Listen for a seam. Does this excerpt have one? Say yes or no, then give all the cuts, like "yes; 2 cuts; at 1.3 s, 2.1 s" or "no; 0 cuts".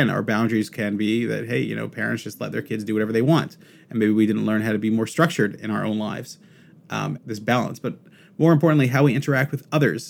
yes; 1 cut; at 7.2 s